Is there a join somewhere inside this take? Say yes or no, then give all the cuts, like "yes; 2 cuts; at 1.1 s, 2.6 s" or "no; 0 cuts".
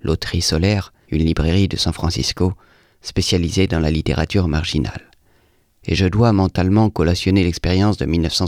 yes; 1 cut; at 1.0 s